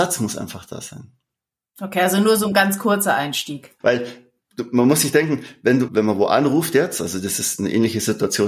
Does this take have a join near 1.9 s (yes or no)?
no